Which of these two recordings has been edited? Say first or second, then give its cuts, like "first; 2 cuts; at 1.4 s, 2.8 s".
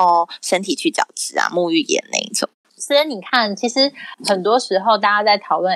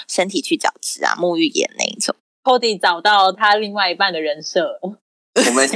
first; 1 cut; at 2.6 s